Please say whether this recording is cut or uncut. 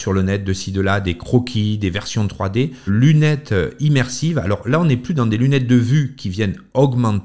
cut